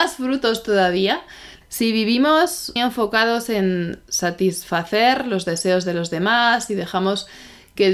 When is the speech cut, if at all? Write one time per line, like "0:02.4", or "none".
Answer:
0:01.6
0:02.8